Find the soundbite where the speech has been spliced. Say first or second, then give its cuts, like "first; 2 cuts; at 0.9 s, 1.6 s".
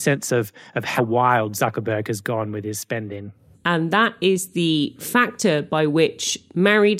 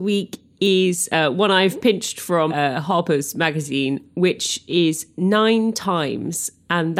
first; 1 cut; at 3.5 s